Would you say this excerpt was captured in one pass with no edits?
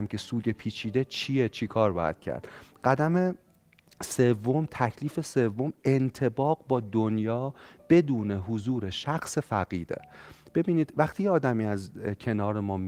yes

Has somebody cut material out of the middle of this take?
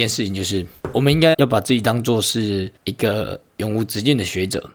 yes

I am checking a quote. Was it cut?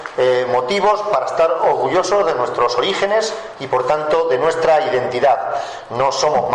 no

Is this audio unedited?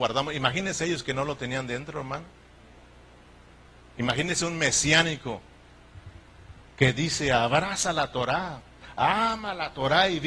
yes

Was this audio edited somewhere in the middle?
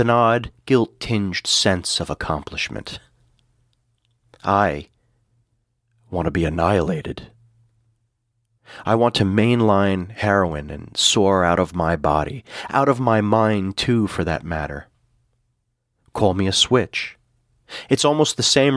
no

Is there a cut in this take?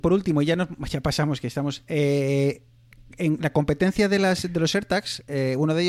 no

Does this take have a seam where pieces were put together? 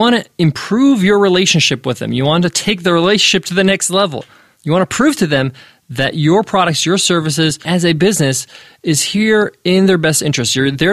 yes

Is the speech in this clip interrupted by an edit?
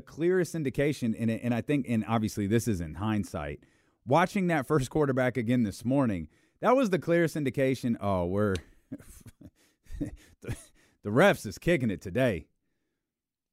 no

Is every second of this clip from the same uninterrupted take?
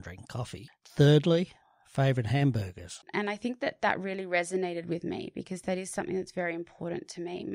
no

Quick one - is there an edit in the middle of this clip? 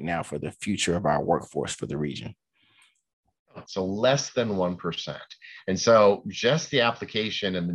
yes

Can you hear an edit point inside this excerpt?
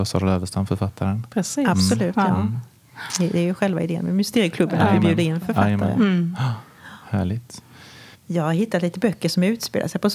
yes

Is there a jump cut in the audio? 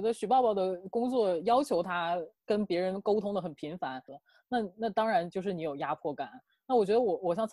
yes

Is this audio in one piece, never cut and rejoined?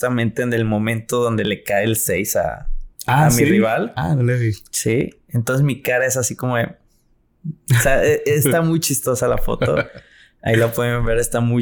yes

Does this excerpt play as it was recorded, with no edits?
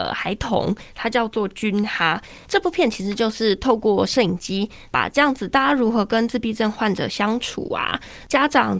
yes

